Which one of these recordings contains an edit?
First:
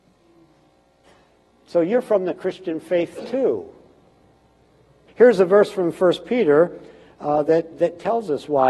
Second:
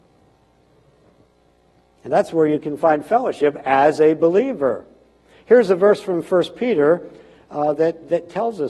first; 1 cut; at 5.1 s

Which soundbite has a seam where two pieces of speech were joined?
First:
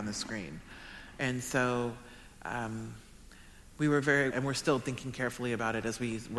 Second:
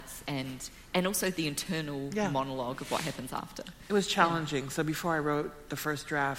first; 1 cut; at 4.3 s

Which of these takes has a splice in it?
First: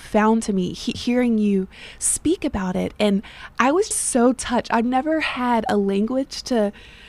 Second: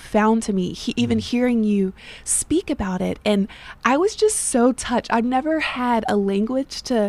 first; 2 cuts; at 0.9 s, 3.9 s

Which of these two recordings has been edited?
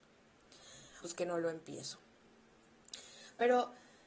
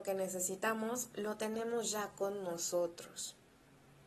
first; 1 cut; at 1.0 s

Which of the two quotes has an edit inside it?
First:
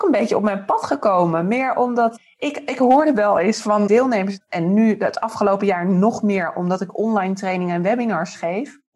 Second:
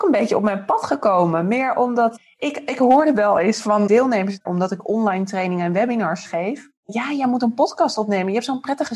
second; 1 cut; at 4.4 s

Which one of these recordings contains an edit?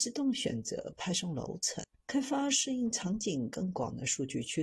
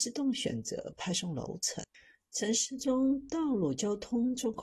first; 1 cut; at 1.9 s

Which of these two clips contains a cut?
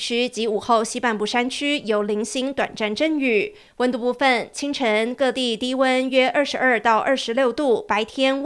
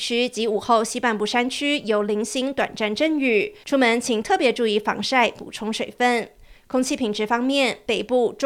second; 1 cut; at 3.6 s

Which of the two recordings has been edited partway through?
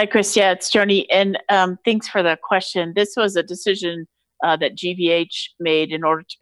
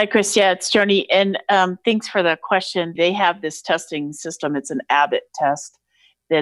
second; 1 cut; at 3.0 s

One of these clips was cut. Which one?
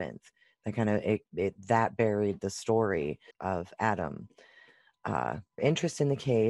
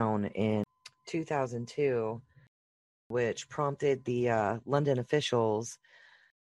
first; 2 cuts; at 3.3 s, 5.6 s

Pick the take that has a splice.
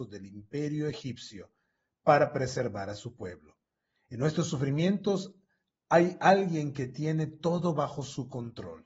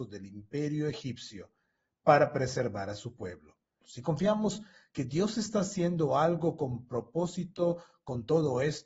second; 1 cut; at 3.8 s

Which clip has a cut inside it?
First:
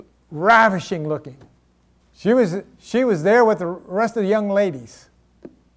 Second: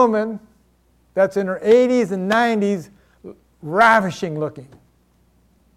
first; 1 cut; at 2.0 s

